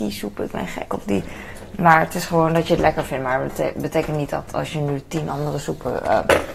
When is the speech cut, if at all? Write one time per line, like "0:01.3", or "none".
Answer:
none